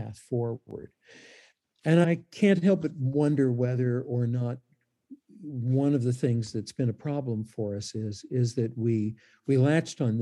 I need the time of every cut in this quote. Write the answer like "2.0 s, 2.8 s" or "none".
2.0 s